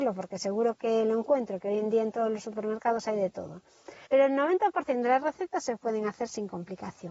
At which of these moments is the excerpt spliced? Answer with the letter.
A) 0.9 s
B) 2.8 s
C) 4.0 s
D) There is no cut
C